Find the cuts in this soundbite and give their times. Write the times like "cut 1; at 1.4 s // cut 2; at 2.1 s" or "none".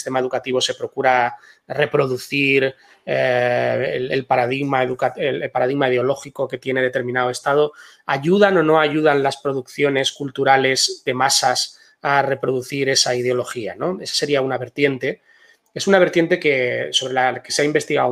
none